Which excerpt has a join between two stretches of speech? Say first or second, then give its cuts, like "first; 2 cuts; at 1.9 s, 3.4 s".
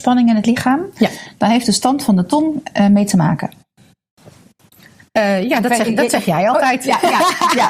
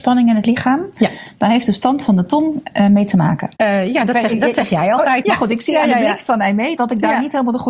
second; 3 cuts; at 3.5 s, 5.2 s, 6.8 s